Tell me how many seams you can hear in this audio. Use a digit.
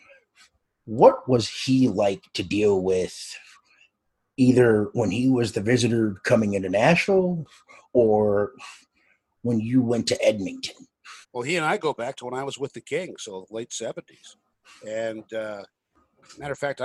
1